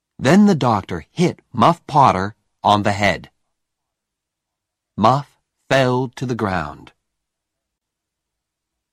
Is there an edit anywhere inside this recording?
no; 0 cuts

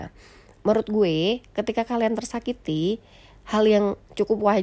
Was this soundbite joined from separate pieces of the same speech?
no; 0 cuts

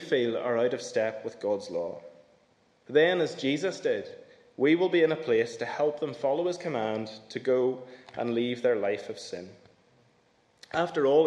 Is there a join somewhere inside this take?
yes; 1 cut; at 2.8 s

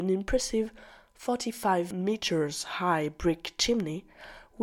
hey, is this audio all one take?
yes; 0 cuts

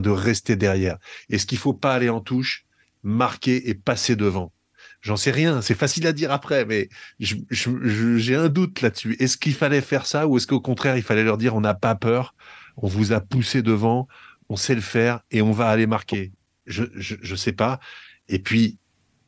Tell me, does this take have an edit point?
no; 0 cuts

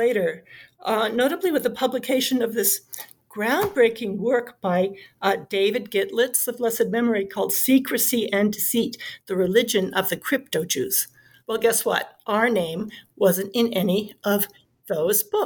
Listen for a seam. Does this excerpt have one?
yes; 1 cut; at 11.4 s

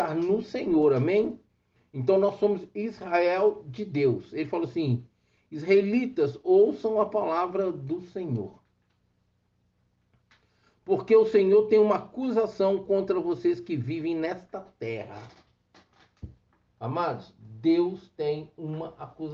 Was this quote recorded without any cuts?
yes; 0 cuts

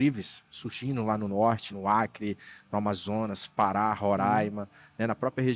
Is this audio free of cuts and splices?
no; 1 cut; at 1.7 s

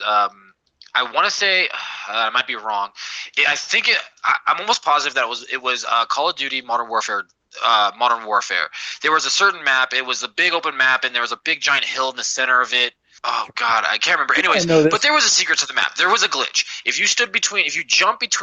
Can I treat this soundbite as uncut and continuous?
yes; 0 cuts

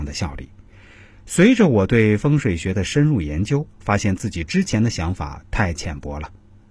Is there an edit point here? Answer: no; 0 cuts

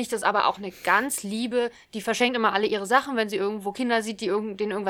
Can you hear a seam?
no; 0 cuts

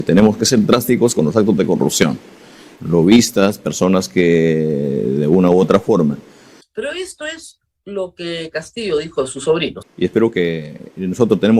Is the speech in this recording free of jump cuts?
no; 3 cuts; at 2.8 s, 6.6 s, 9.8 s

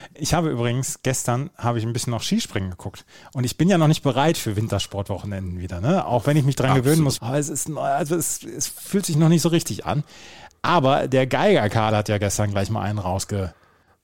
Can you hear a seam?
yes; 1 cut; at 7.2 s

